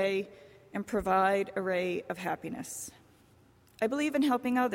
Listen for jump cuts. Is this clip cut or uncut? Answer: uncut